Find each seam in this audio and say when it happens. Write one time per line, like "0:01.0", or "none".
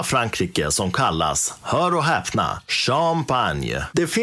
none